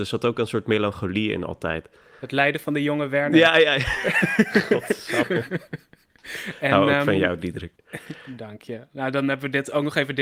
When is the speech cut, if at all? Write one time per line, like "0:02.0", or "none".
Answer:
0:05.2